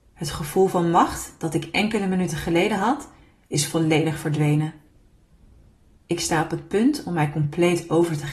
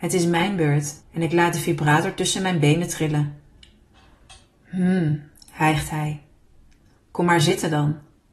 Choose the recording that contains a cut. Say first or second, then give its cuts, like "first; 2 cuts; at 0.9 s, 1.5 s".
second; 1 cut; at 1.0 s